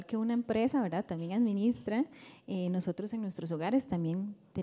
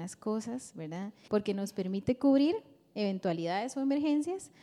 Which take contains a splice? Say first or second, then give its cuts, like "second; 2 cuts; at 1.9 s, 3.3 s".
second; 1 cut; at 1.2 s